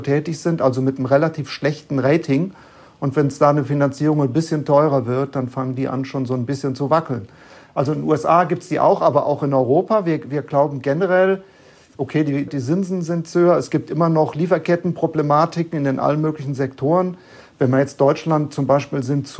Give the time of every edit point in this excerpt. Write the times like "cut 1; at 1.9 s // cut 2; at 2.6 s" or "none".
cut 1; at 12.5 s